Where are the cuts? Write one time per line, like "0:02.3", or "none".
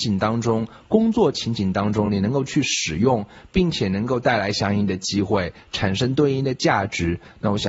none